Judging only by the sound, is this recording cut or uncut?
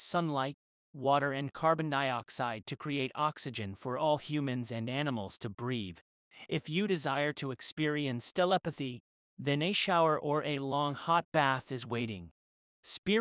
cut